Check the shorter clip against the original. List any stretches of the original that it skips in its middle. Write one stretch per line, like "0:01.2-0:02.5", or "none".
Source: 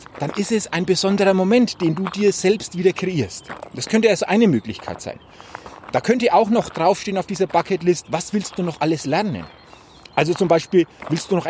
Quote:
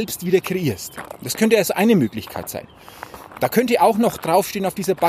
none